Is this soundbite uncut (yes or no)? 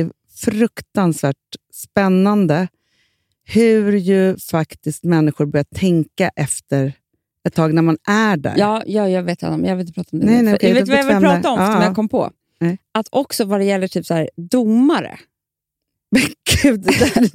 yes